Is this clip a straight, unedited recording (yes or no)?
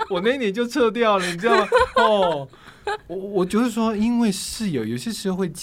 yes